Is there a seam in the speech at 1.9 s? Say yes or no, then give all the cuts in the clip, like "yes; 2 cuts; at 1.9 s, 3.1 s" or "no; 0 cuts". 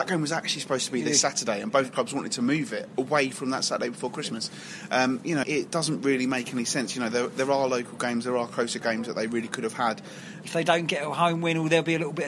no; 2 cuts; at 5.4 s, 10.4 s